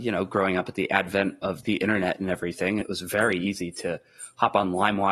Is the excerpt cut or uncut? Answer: cut